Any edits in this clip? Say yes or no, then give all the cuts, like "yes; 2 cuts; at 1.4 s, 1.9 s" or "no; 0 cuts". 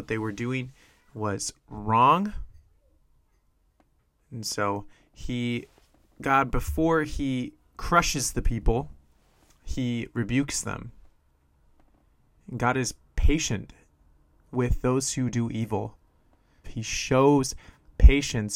yes; 1 cut; at 16.6 s